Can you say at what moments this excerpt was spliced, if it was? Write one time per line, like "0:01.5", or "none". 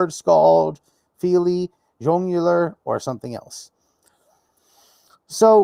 none